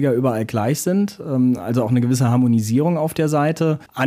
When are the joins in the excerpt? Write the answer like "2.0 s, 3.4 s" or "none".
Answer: none